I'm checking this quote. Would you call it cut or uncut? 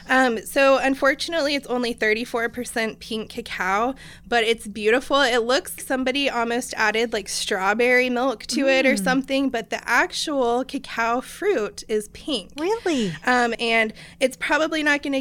cut